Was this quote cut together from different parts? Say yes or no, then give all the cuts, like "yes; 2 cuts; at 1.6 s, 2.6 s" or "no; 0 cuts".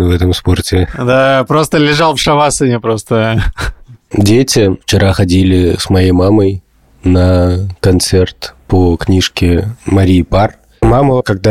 no; 0 cuts